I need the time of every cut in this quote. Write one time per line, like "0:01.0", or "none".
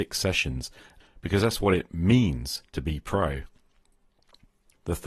0:01.0